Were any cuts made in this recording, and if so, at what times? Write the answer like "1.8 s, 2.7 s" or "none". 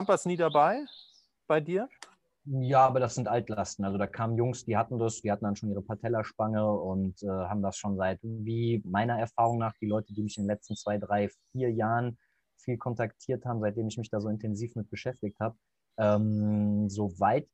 8.8 s, 15.9 s